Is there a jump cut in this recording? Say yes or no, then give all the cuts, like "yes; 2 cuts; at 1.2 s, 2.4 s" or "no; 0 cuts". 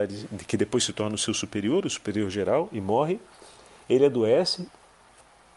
no; 0 cuts